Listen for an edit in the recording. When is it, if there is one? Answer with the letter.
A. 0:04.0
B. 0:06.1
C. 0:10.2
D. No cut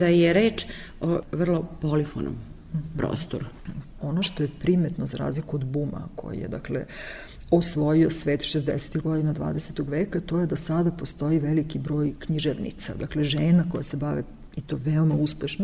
A